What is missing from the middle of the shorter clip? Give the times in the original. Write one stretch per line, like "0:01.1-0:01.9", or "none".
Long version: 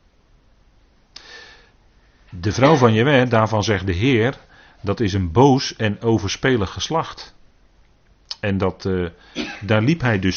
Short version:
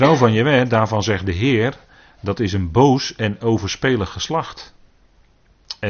none